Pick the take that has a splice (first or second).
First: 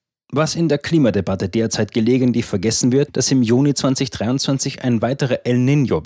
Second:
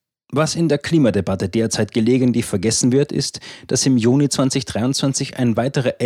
first